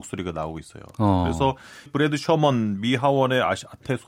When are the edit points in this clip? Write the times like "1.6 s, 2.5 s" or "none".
1.9 s